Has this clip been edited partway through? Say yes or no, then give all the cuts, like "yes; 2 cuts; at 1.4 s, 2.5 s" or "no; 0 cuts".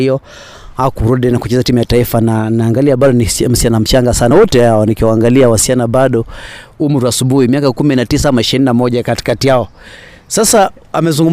no; 0 cuts